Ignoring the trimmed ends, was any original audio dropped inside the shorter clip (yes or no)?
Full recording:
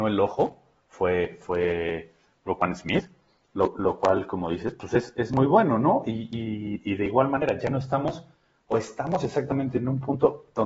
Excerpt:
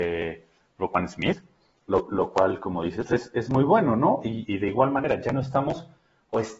yes